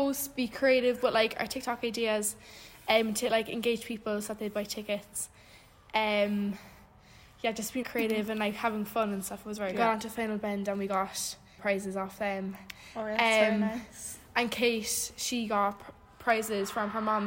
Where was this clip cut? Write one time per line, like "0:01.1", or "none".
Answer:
0:07.8
0:09.7
0:11.6